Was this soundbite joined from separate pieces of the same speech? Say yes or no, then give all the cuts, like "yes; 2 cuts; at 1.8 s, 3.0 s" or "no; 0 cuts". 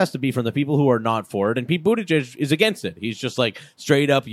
no; 0 cuts